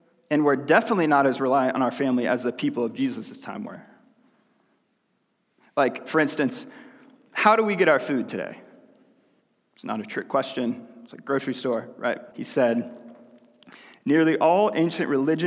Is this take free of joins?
no; 1 cut; at 12.3 s

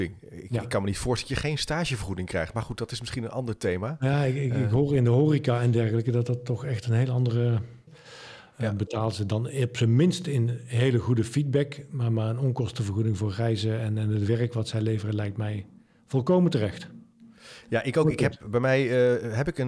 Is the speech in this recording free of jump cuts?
no; 1 cut; at 7.9 s

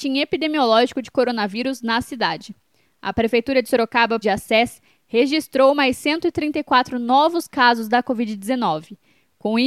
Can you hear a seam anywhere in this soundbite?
yes; 1 cut; at 4.2 s

